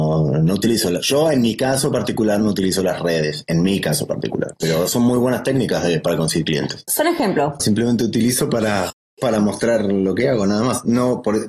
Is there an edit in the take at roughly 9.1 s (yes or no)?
no